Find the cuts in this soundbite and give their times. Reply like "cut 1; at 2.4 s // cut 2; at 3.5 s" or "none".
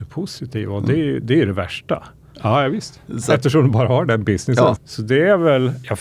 cut 1; at 2.3 s // cut 2; at 4.8 s